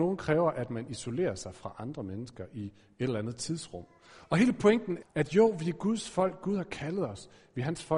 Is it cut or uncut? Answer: cut